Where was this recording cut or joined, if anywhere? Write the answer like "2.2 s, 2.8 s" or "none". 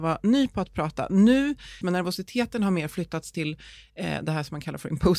1.8 s